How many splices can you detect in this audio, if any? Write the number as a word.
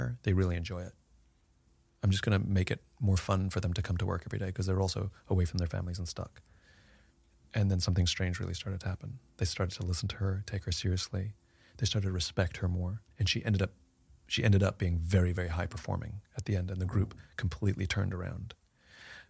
one